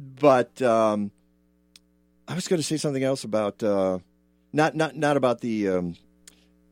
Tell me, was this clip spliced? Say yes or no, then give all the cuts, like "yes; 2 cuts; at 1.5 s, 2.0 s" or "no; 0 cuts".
no; 0 cuts